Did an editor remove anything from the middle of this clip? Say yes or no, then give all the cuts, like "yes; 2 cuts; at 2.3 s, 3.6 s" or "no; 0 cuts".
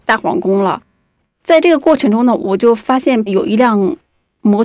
no; 0 cuts